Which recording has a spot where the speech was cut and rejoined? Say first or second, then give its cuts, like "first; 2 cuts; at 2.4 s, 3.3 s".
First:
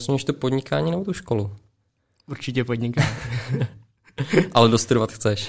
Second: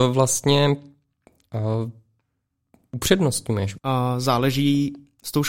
second; 1 cut; at 3.8 s